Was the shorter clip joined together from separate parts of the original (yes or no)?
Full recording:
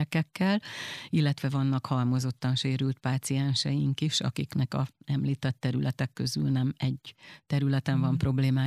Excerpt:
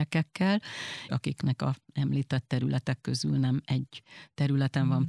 yes